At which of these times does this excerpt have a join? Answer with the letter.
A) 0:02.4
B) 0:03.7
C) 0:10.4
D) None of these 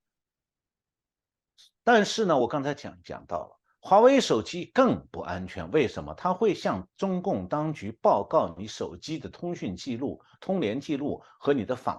D